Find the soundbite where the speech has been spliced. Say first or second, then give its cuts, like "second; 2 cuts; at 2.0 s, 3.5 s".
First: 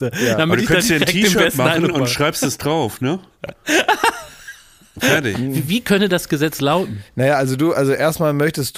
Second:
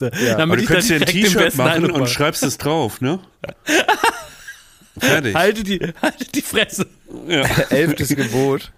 first; 1 cut; at 5.3 s